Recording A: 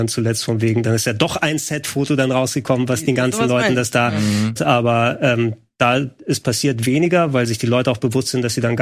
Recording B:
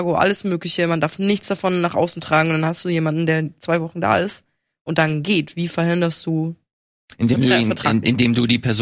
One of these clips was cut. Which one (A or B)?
A